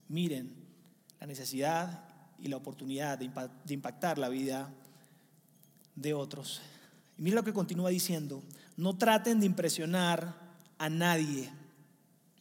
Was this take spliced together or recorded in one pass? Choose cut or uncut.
uncut